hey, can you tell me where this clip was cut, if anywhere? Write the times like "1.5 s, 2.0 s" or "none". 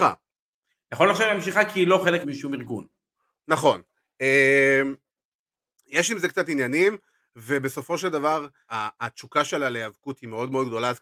2.2 s, 8.7 s

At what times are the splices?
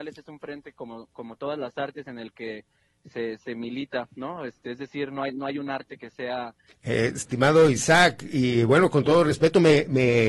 6.7 s

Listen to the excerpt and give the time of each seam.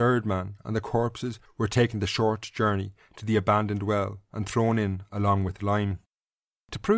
none

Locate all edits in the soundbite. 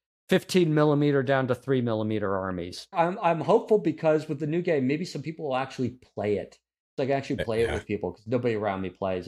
2.9 s

